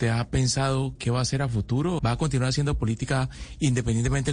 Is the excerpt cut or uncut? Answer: cut